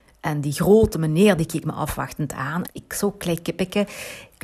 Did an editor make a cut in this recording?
yes; 2 cuts; at 1.4 s, 2.7 s

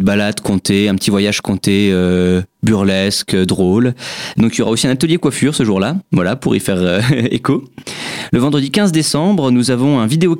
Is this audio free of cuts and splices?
yes; 0 cuts

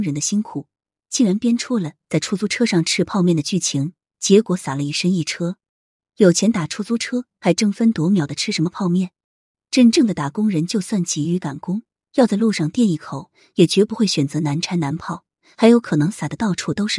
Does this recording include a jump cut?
no; 0 cuts

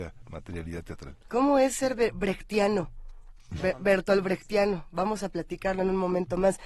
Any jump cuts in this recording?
no; 0 cuts

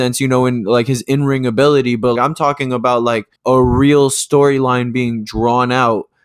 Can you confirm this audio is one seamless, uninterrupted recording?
no; 2 cuts; at 2.2 s, 3.4 s

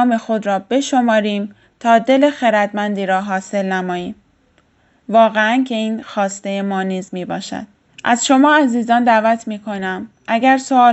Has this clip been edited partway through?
yes; 1 cut; at 7.9 s

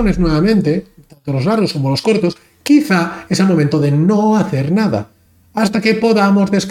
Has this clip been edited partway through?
no; 0 cuts

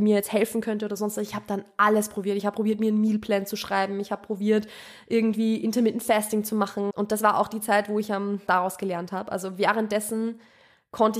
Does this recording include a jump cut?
yes; 2 cuts; at 6.9 s, 8.5 s

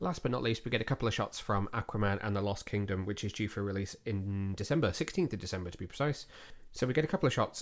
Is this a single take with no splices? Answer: yes; 0 cuts

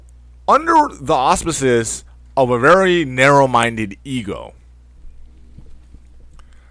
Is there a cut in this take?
no; 0 cuts

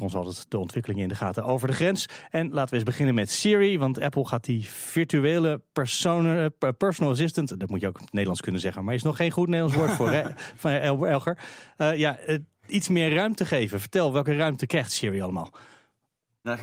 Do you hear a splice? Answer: no; 0 cuts

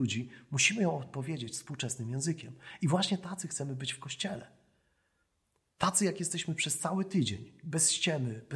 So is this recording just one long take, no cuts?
yes; 0 cuts

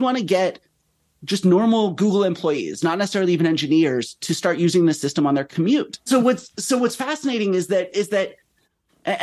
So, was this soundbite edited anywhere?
yes; 1 cut; at 6.1 s

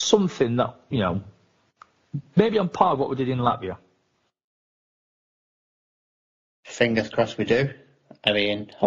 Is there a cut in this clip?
no; 0 cuts

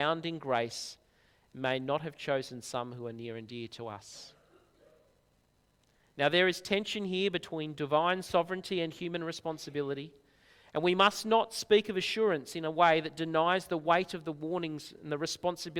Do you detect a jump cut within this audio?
no; 0 cuts

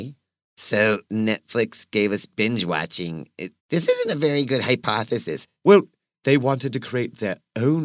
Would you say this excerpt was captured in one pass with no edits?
no; 2 cuts; at 3.6 s, 6.1 s

